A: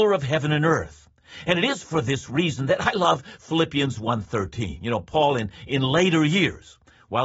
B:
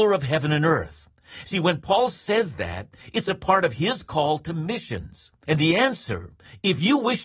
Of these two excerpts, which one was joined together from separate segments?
B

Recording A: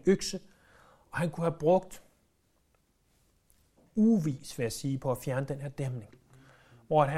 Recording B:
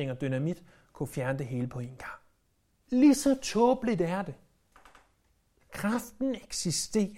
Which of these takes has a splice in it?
B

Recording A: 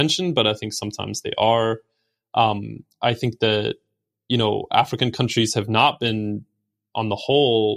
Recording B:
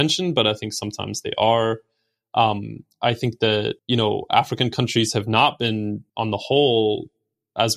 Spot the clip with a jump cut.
B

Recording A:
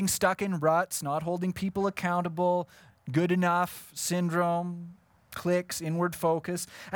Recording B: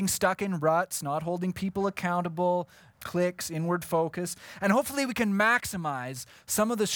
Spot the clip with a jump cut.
B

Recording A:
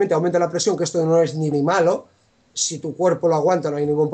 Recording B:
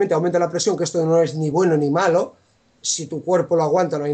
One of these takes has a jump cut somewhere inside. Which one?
A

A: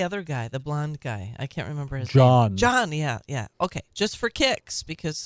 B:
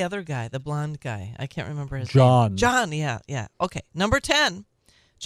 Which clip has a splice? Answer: A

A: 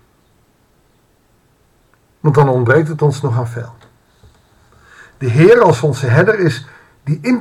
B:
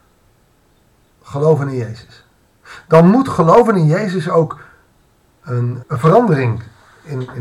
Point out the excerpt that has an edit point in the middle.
B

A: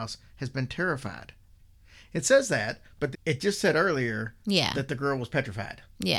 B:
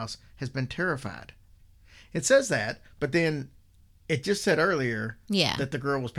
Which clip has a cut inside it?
A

